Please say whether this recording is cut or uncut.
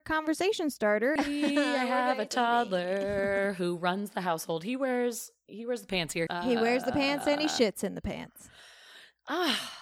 cut